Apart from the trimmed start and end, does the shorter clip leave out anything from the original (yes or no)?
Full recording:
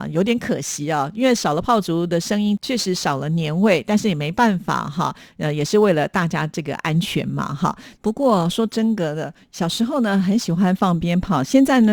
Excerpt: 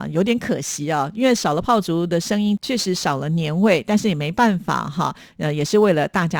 no